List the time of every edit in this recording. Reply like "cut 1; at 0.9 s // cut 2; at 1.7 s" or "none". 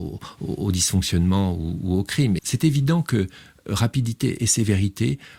cut 1; at 2.4 s